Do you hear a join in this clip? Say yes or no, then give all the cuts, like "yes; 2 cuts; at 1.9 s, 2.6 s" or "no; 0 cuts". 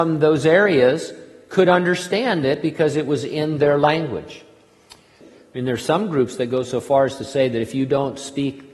yes; 1 cut; at 5.2 s